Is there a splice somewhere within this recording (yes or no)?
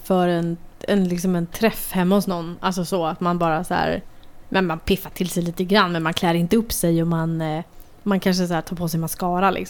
no